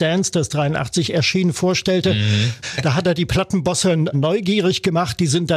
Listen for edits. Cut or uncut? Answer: cut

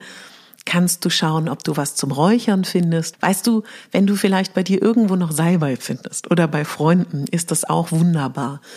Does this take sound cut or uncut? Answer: cut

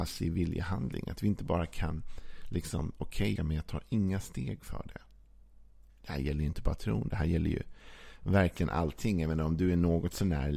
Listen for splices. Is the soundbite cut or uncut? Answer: cut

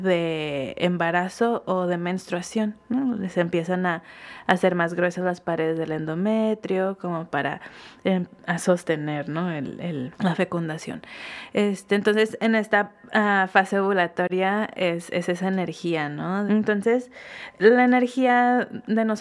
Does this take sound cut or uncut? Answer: cut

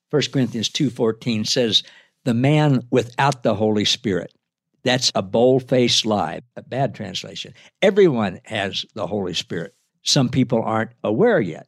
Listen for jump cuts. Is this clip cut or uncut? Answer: uncut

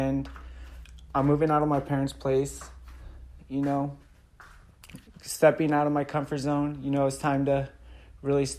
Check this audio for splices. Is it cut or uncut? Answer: cut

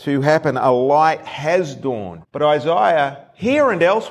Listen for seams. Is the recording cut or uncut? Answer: cut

